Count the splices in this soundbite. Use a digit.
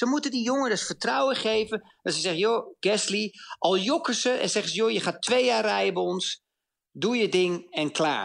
0